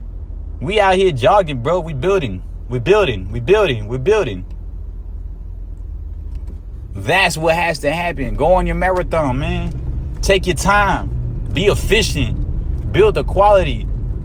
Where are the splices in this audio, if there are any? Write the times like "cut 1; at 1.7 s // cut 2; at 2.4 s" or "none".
none